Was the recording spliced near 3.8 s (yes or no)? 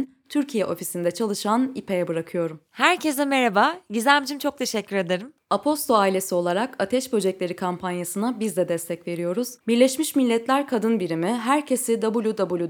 no